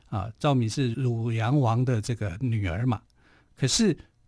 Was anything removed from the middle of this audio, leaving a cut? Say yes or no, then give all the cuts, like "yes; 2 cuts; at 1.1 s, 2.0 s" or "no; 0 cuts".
yes; 1 cut; at 0.9 s